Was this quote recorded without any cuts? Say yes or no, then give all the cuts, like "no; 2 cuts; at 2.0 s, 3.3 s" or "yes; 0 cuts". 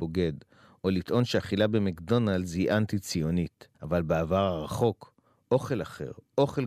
no; 1 cut; at 3.7 s